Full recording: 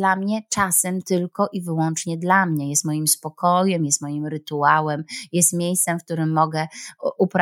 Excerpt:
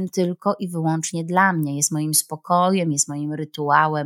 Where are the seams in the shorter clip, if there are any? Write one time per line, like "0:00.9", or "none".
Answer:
none